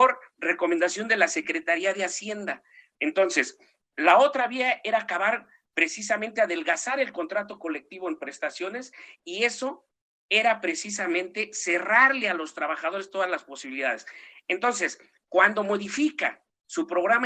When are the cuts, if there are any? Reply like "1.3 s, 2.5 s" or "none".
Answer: 2.9 s